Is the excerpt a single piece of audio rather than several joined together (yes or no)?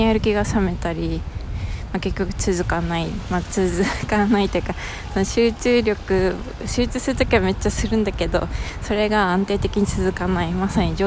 yes